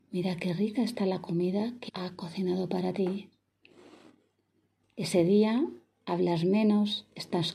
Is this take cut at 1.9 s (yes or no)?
yes